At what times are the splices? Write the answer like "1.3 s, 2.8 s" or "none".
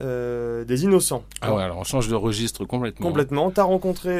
none